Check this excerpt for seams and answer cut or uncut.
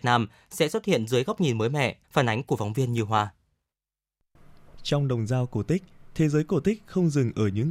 cut